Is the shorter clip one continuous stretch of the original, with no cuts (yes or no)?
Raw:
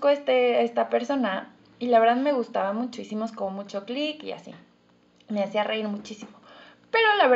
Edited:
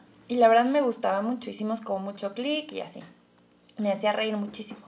yes